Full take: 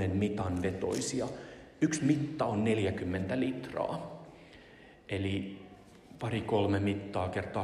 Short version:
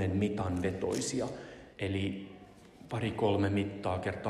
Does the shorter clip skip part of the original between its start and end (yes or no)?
yes